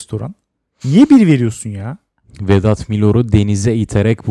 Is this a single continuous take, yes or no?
yes